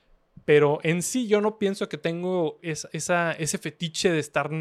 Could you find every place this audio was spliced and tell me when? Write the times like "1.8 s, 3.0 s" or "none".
2.6 s